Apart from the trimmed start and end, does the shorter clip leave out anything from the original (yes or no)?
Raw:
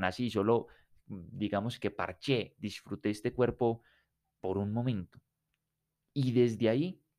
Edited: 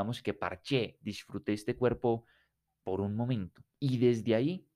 yes